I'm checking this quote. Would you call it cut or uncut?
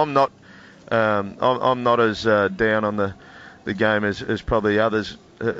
uncut